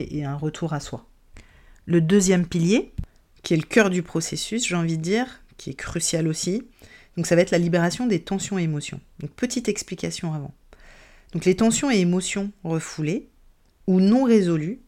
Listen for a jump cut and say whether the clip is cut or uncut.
uncut